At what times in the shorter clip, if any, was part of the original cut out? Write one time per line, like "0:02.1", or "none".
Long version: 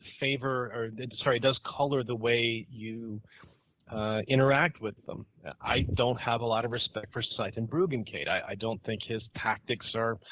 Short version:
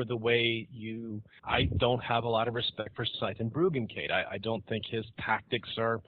0:01.4